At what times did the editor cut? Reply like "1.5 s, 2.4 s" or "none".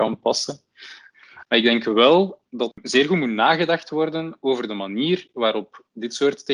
1.4 s, 2.7 s